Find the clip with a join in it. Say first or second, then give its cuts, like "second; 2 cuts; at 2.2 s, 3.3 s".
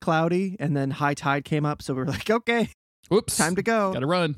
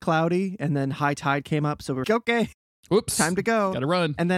second; 1 cut; at 2.0 s